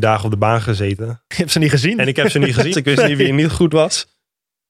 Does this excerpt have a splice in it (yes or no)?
yes